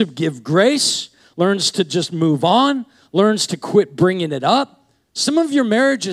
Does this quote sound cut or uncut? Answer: uncut